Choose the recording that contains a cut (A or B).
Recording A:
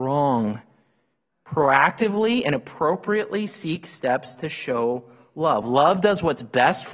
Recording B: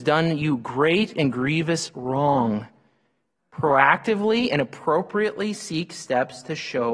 A